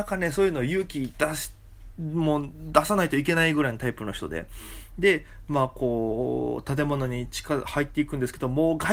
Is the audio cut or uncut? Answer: uncut